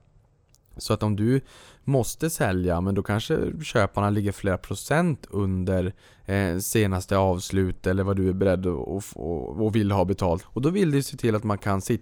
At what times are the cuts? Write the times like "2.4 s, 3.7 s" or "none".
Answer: 10.4 s